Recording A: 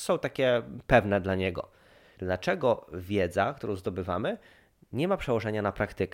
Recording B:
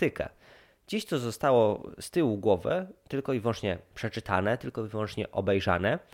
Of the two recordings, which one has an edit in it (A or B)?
A